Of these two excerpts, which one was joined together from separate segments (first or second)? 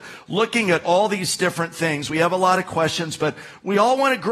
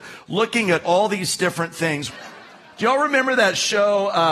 second